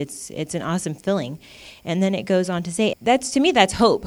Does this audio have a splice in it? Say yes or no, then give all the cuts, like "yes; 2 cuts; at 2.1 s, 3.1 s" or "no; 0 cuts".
yes; 1 cut; at 2.9 s